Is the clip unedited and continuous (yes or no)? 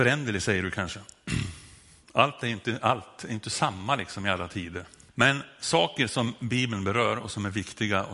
no